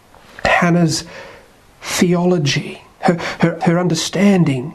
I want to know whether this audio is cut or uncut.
cut